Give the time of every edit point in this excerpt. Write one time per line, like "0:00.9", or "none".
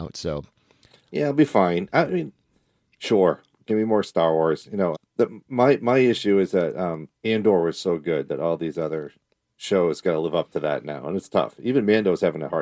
0:04.9